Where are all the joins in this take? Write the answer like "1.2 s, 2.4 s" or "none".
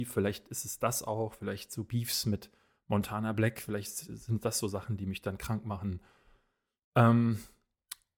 none